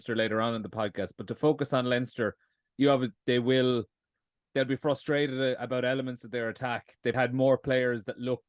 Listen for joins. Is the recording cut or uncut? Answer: cut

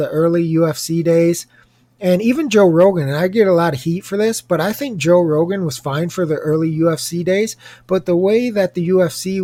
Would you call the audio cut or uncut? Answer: uncut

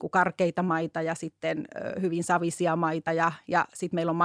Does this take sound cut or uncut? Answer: uncut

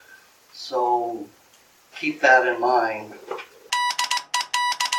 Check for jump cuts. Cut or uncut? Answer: cut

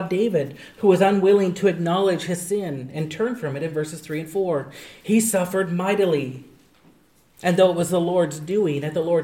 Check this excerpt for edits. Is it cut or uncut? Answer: cut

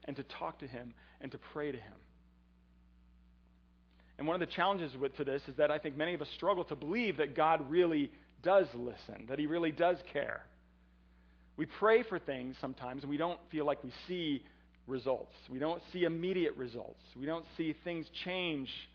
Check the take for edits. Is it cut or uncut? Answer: uncut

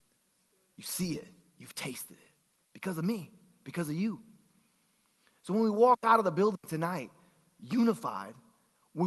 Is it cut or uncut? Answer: uncut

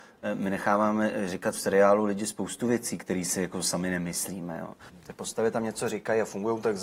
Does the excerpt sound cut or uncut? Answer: cut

